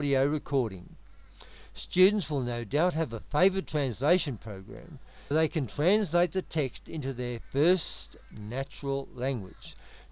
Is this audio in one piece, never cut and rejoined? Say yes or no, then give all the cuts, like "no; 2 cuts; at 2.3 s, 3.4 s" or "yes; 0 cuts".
no; 1 cut; at 5.3 s